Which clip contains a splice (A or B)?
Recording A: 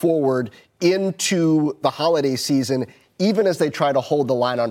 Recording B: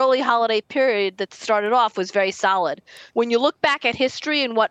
B